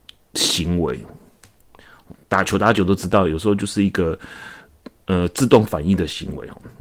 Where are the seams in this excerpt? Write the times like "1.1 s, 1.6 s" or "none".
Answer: none